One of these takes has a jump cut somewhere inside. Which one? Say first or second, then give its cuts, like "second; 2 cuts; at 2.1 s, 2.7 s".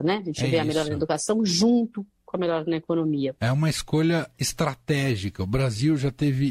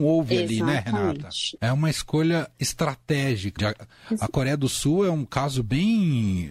second; 2 cuts; at 1.6 s, 3.6 s